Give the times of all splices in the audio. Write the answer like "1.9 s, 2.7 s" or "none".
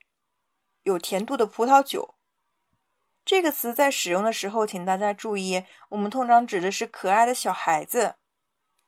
3.1 s

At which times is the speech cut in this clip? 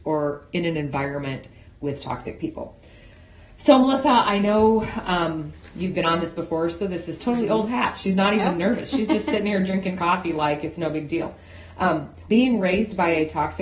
12.3 s

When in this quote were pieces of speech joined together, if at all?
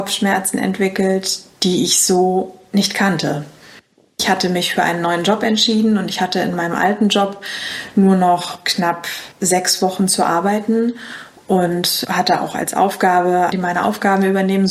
9.3 s, 13.5 s

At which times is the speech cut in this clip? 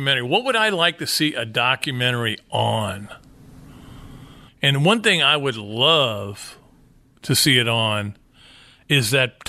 4.5 s

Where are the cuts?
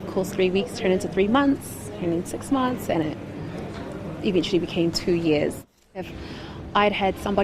5.9 s

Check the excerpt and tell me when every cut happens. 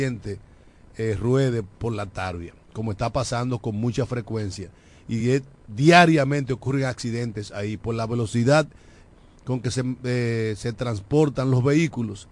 none

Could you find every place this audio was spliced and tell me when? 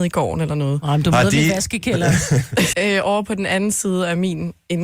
2.7 s

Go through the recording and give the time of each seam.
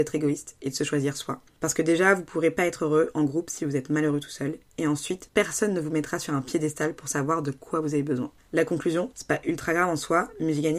5.3 s, 9.1 s

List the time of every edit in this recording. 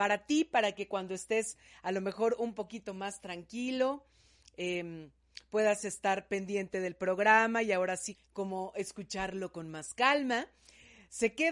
8.1 s

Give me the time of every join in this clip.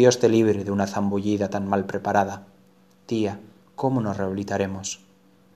none

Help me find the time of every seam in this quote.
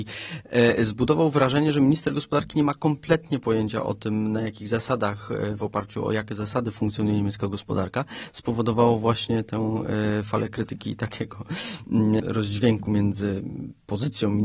12.2 s

